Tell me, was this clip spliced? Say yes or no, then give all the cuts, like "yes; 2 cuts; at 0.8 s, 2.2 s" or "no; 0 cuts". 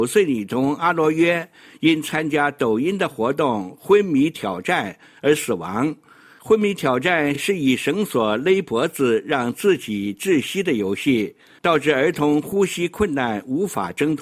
no; 0 cuts